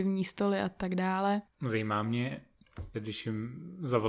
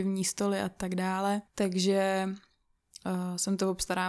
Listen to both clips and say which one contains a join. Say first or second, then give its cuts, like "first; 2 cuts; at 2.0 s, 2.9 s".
first; 2 cuts; at 1.5 s, 2.9 s